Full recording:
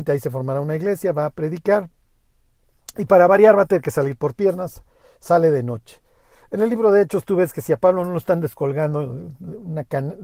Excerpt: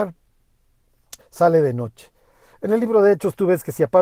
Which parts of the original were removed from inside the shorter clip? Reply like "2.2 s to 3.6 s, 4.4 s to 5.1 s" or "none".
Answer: 2.9 s to 5.1 s